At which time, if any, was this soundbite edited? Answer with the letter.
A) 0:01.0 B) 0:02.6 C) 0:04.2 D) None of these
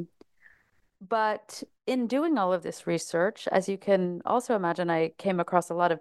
D